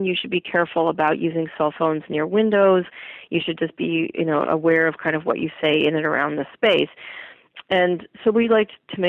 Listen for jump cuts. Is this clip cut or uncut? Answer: uncut